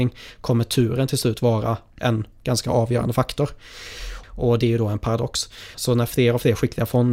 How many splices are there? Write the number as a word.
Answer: two